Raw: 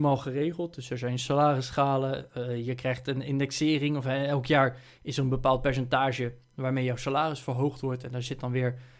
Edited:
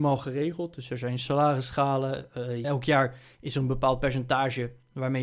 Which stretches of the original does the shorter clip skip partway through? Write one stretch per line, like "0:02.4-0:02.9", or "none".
0:02.6-0:04.3

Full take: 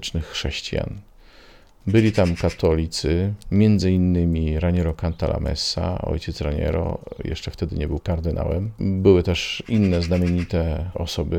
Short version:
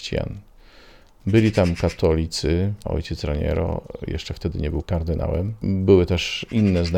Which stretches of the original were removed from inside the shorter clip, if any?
0:03.4-0:06.0

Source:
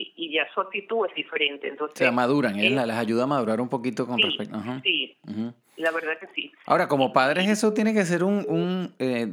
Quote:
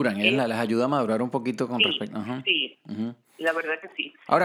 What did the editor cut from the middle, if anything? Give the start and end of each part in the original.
none

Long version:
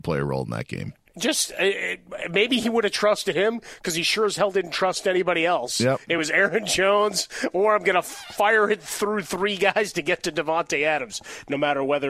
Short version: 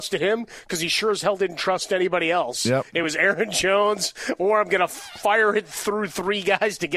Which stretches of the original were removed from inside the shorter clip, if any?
none

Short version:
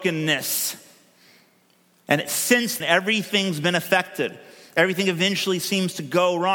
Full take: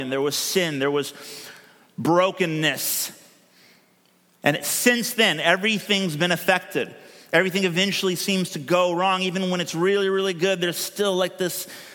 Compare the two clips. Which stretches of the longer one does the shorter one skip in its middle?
0:05.2-0:05.4

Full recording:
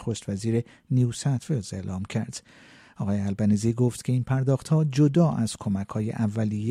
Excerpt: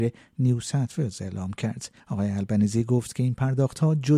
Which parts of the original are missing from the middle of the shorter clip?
0:02.5-0:02.9

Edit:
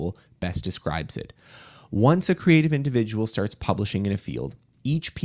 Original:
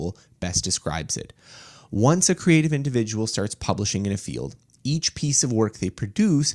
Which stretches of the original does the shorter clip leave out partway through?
none

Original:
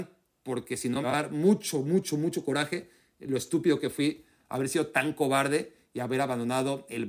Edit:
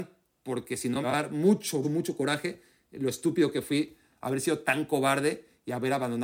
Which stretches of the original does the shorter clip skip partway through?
0:01.8-0:02.1

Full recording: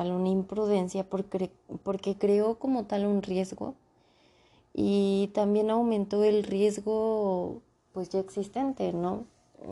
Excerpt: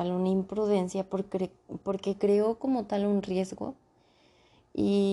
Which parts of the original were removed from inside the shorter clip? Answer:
none

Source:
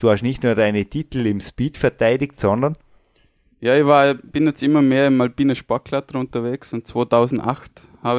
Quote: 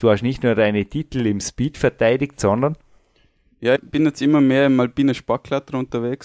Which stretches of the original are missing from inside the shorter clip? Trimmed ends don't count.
0:03.8-0:04.2

